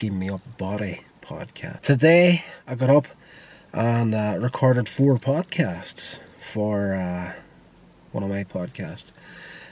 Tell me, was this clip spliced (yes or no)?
yes